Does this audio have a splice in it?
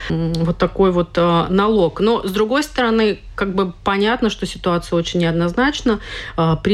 no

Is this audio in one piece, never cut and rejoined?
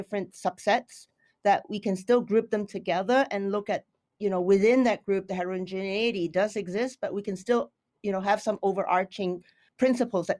yes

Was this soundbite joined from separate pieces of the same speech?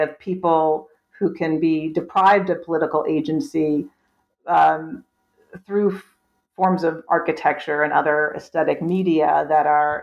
no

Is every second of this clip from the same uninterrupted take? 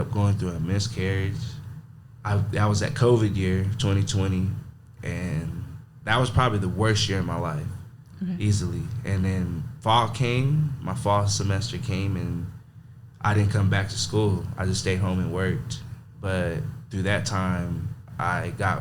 no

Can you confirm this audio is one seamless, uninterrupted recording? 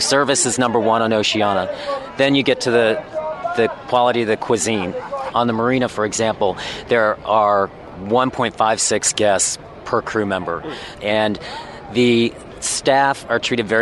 no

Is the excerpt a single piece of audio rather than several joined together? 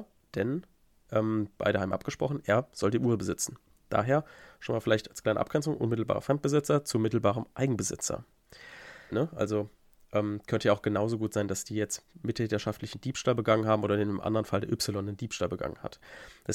no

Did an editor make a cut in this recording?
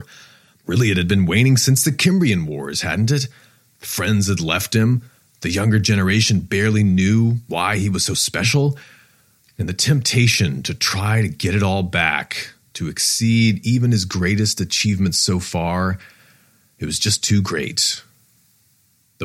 no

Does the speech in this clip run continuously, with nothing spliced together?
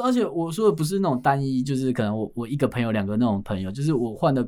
yes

